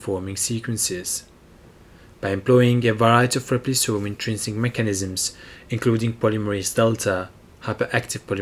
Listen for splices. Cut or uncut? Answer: uncut